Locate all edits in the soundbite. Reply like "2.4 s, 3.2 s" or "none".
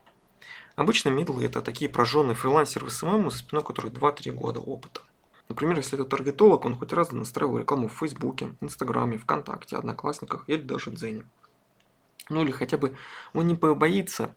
5.4 s